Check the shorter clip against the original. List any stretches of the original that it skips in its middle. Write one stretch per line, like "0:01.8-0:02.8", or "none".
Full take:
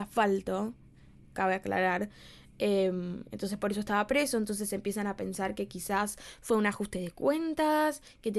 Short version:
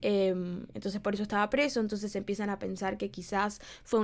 none